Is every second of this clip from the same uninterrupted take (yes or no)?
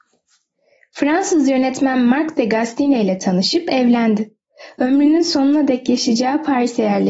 yes